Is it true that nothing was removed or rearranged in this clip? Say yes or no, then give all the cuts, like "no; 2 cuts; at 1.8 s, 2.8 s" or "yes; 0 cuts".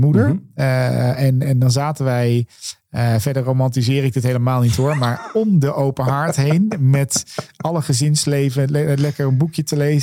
no; 1 cut; at 1.4 s